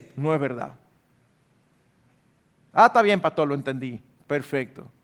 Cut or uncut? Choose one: uncut